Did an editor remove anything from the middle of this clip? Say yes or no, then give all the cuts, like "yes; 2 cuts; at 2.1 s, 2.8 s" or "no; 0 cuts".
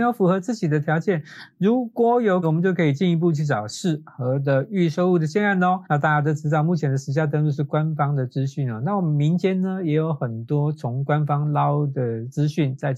yes; 2 cuts; at 2.4 s, 5.9 s